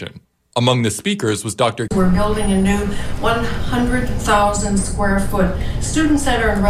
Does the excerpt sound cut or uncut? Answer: cut